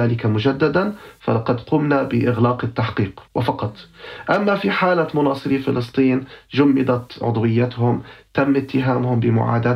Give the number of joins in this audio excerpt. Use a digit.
1